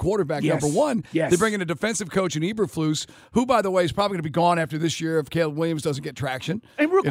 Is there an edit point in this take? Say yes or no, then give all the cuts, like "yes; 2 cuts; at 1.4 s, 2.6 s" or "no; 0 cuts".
no; 0 cuts